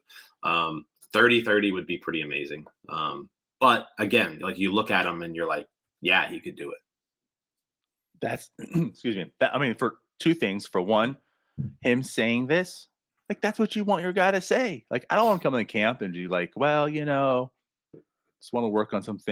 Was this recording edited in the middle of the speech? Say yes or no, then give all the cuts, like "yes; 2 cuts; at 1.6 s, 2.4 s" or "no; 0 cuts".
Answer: no; 0 cuts